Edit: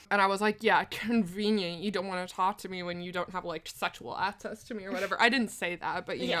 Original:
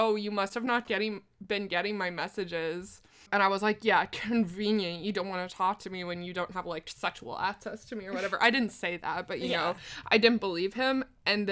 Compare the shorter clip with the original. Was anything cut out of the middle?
no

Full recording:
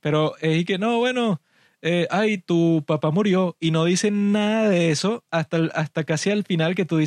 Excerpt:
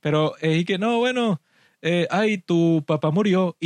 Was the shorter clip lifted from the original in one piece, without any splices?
yes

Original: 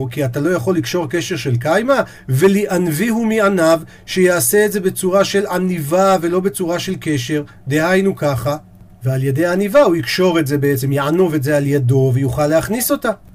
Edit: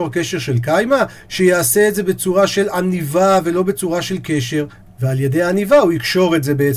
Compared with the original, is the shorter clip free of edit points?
no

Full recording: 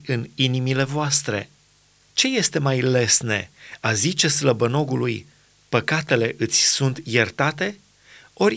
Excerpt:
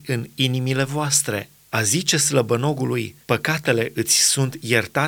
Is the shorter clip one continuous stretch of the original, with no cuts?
no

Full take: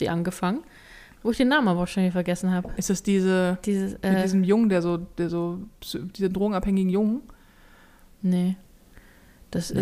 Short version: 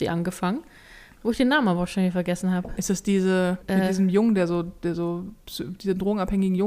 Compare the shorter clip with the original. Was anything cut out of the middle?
yes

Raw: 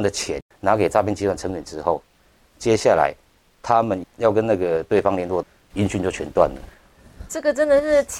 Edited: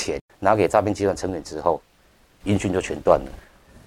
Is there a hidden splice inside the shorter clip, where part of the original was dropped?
yes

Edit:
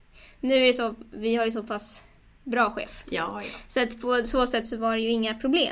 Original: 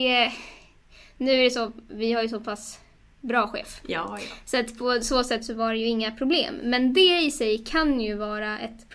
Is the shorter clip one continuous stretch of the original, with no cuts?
yes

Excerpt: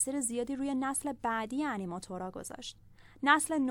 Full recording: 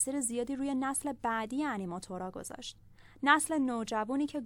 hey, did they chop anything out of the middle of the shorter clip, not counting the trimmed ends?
no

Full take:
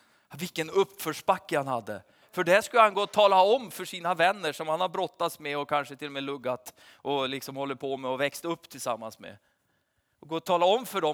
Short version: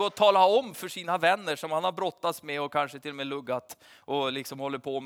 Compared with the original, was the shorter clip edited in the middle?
no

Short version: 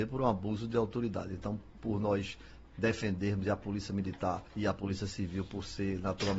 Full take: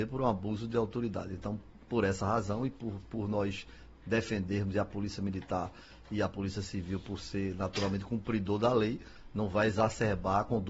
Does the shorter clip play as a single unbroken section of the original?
no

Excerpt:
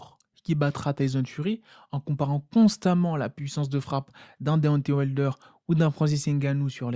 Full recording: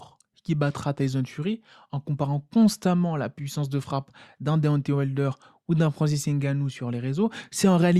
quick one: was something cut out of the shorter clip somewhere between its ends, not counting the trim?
no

